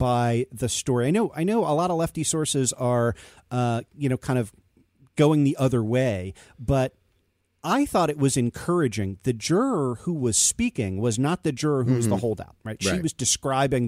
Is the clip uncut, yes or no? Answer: yes